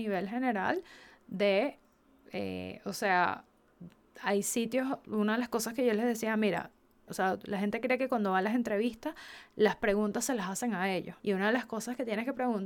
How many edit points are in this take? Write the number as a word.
two